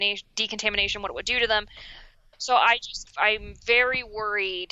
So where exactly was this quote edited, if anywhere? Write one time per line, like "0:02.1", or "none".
0:03.1